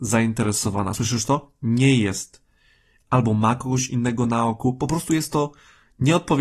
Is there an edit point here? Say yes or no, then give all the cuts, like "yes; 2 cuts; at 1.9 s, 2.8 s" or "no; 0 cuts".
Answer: no; 0 cuts